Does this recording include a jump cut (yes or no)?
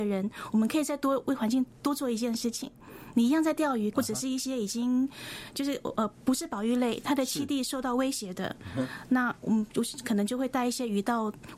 yes